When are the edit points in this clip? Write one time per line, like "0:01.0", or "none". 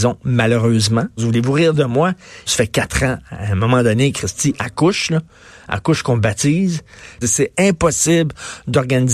0:01.2
0:02.5
0:07.2